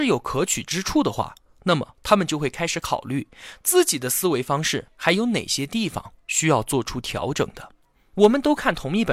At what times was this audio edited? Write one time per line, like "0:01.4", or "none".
0:08.1